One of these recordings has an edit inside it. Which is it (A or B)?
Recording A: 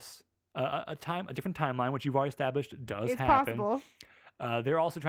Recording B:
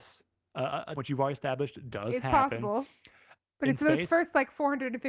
B